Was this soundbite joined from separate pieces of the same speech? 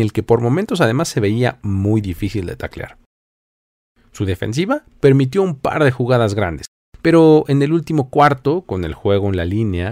no; 0 cuts

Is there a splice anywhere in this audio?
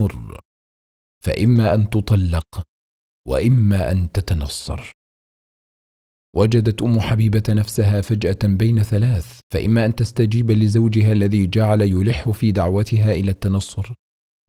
yes; 1 cut; at 9.4 s

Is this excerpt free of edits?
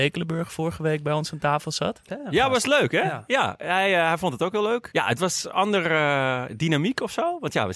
no; 2 cuts; at 2.1 s, 4.9 s

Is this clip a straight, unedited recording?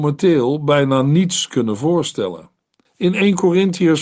no; 1 cut; at 2.9 s

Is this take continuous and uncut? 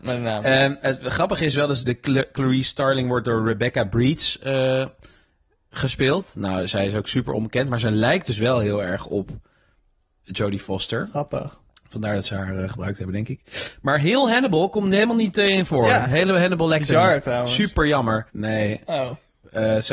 no; 2 cuts; at 1.8 s, 18.3 s

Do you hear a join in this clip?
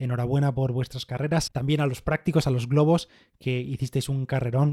yes; 1 cut; at 1.5 s

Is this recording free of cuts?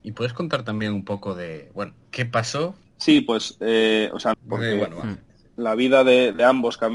no; 2 cuts; at 2.8 s, 4.3 s

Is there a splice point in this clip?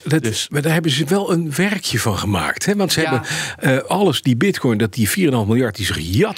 no; 0 cuts

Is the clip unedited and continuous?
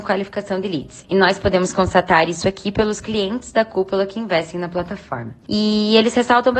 no; 1 cut; at 5.4 s

